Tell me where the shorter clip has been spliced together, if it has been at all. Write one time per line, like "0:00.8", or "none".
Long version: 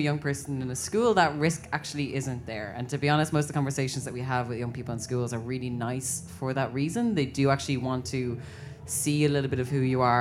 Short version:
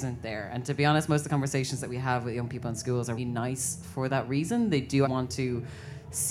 0:03.2
0:05.0